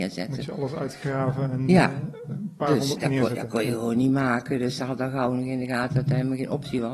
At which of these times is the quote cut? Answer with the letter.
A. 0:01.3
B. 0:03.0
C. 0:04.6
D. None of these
B